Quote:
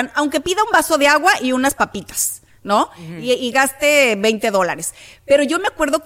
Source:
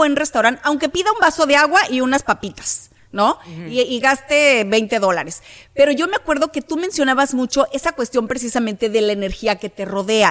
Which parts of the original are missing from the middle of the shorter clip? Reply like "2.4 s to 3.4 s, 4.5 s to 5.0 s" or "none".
none